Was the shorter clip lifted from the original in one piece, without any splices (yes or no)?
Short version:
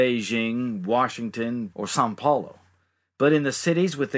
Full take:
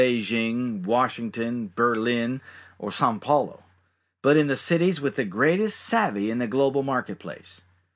no